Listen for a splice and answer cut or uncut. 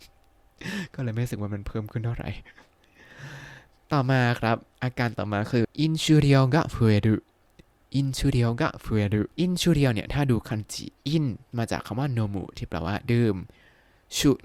cut